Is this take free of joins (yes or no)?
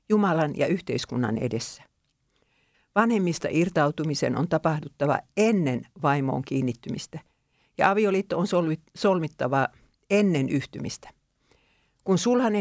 no